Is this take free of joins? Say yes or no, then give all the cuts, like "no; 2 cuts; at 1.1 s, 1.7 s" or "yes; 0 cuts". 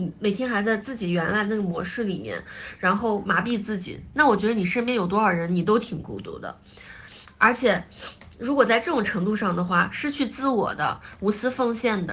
yes; 0 cuts